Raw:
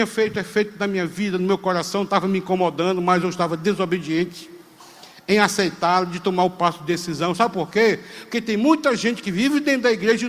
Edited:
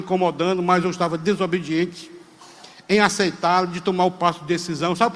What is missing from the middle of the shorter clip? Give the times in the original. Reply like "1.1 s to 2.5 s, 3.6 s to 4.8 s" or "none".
none